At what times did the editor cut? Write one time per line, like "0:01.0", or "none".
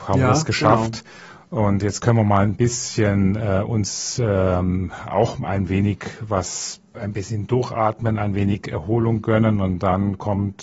0:06.9